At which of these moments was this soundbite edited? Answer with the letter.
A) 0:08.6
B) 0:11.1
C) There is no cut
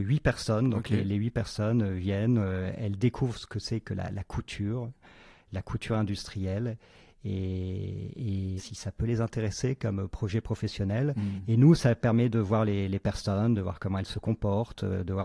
A